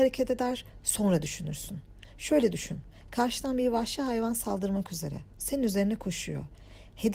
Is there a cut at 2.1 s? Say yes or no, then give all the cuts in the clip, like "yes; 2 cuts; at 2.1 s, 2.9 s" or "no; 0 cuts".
no; 0 cuts